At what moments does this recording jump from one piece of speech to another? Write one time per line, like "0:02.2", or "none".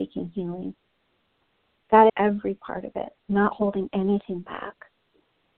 0:02.1
0:03.2